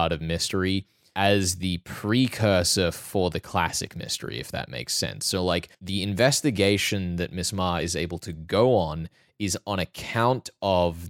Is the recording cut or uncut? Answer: cut